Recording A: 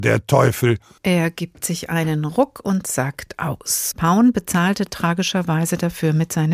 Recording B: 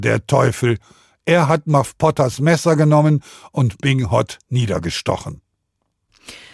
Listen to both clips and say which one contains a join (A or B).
A